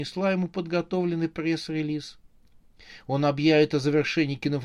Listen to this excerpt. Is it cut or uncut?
uncut